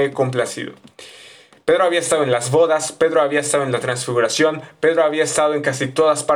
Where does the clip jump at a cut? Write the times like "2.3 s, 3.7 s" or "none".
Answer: none